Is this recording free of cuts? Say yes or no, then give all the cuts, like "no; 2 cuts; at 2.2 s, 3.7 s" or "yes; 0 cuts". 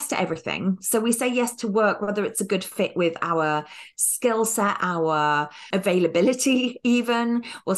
no; 1 cut; at 4.8 s